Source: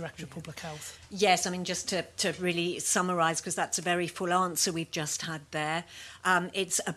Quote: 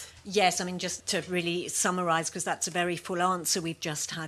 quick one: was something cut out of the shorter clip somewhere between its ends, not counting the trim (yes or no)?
yes